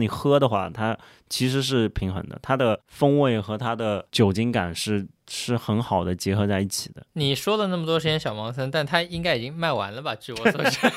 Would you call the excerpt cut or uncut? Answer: uncut